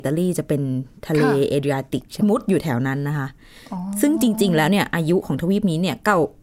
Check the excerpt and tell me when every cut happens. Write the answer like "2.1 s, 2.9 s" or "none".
2.2 s